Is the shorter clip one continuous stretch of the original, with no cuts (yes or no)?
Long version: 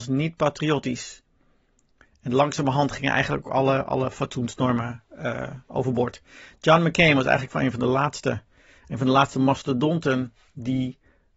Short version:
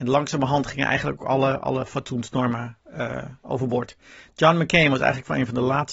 yes